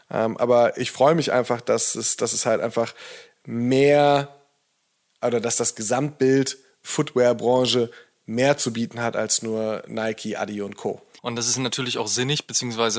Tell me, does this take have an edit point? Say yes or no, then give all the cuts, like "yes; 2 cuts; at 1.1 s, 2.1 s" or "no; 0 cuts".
yes; 1 cut; at 11.2 s